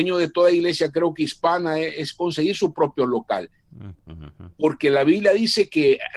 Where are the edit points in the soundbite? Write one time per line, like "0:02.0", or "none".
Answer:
0:03.9

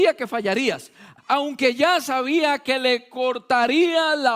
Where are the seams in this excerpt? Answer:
0:01.2

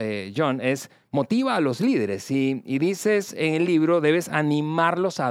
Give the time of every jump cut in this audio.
0:02.6

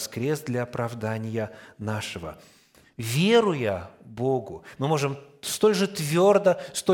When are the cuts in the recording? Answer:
0:02.8
0:04.8

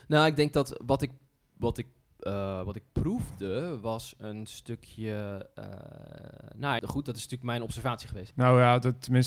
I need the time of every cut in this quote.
0:06.8
0:08.3

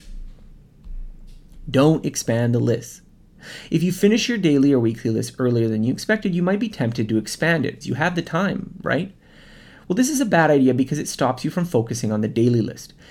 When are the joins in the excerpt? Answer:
0:07.8

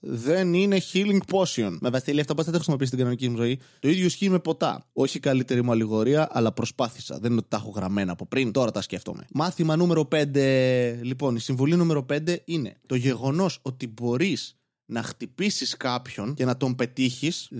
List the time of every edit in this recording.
0:04.9

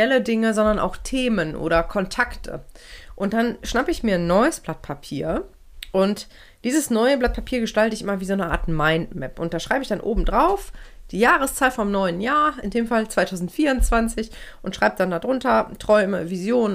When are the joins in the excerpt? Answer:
none

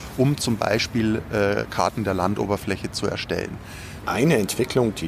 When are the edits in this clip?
0:04.0

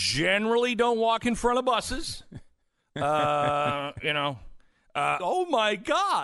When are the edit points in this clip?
0:05.2

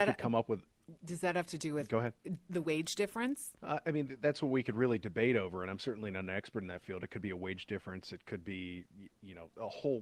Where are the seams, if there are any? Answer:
0:03.6

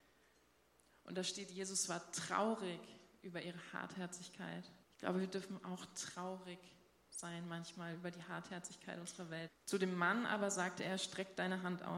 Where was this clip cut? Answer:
0:04.8
0:09.5

